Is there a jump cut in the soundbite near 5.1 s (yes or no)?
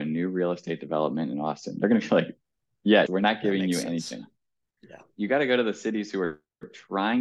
no